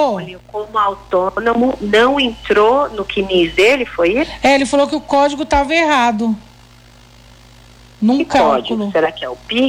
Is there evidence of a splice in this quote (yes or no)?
no